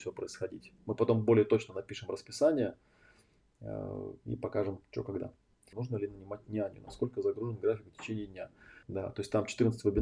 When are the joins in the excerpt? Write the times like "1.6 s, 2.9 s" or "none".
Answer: 5.7 s, 8.8 s

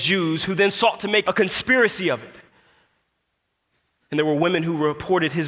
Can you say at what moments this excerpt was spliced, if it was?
1.2 s

